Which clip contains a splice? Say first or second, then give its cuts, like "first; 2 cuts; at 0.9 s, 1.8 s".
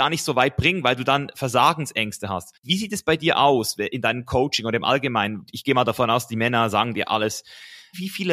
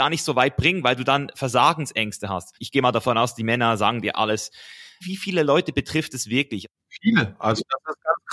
second; 1 cut; at 2.6 s